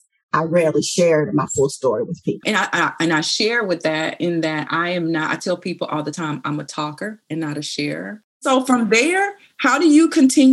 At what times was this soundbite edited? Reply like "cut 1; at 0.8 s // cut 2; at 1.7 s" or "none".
cut 1; at 2.4 s